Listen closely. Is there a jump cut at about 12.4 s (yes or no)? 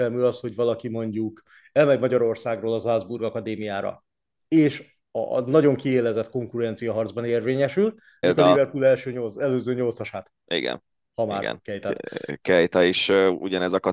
no